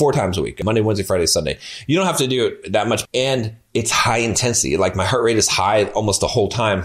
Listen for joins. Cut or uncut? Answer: cut